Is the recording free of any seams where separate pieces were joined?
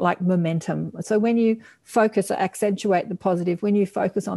no; 1 cut; at 1.0 s

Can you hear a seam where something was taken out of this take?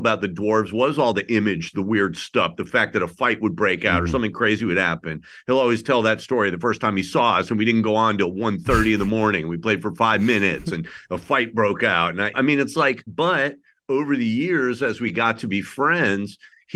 yes; 1 cut; at 12.3 s

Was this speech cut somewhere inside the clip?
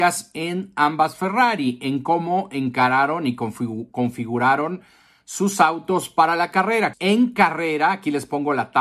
yes; 1 cut; at 6.9 s

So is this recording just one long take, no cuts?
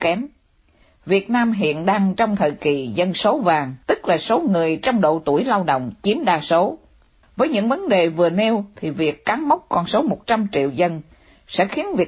no; 2 cuts; at 3.8 s, 7.2 s

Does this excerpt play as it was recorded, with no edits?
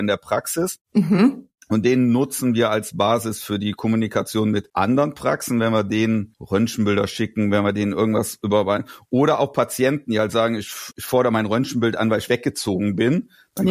no; 1 cut; at 10.9 s

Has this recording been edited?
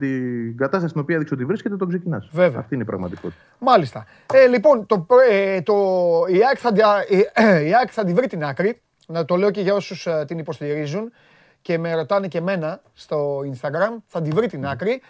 no; 0 cuts

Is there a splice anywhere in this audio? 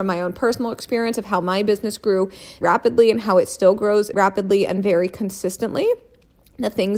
yes; 2 cuts; at 2.6 s, 4.1 s

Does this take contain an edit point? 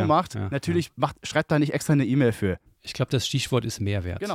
yes; 1 cut; at 2.7 s

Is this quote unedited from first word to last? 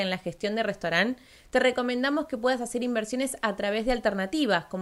yes; 0 cuts

